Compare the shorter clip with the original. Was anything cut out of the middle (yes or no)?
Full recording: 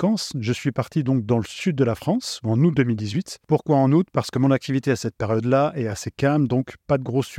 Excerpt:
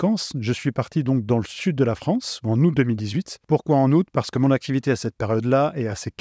no